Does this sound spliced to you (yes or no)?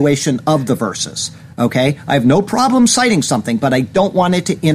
no